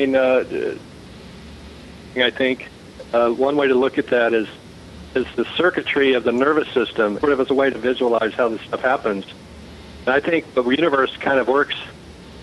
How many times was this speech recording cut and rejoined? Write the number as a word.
two